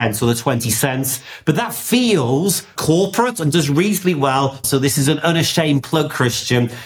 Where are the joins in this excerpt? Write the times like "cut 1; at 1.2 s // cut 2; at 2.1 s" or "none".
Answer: cut 1; at 2.8 s // cut 2; at 4.6 s